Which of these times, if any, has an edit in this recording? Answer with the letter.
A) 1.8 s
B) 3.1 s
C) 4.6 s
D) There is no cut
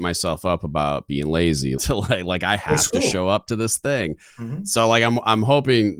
A